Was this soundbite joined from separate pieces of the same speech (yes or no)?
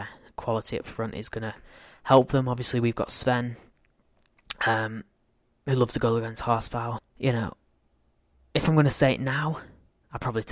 yes